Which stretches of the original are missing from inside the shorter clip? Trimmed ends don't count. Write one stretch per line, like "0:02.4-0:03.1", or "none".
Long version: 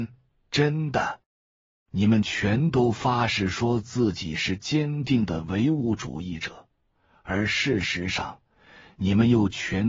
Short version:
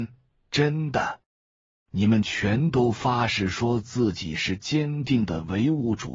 none